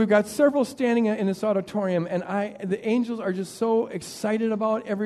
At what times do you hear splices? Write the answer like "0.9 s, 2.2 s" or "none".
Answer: none

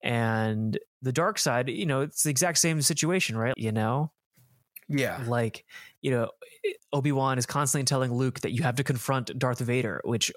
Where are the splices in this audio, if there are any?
3.5 s

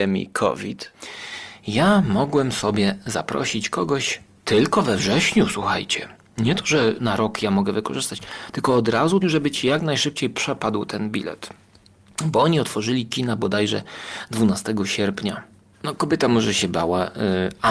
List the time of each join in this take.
7.0 s, 9.2 s, 15.7 s

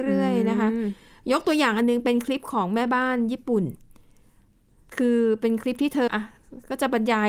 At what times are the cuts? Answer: 6.1 s

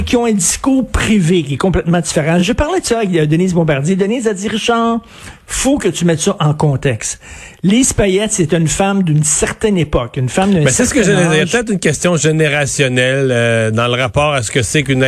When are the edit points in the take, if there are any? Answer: none

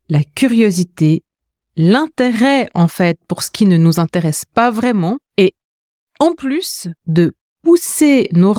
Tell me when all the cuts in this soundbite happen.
5.3 s, 7.0 s

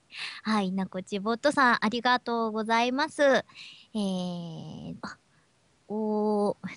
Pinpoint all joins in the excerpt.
5.0 s

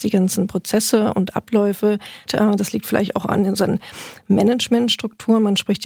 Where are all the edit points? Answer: 2.3 s

